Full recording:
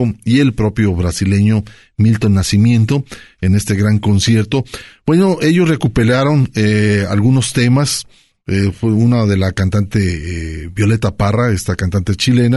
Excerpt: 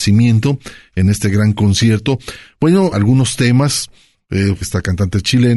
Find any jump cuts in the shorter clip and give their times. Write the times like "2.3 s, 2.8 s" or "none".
2.9 s, 4.6 s